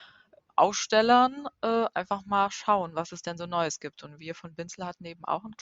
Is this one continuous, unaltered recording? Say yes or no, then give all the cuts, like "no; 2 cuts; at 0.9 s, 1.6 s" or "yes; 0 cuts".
yes; 0 cuts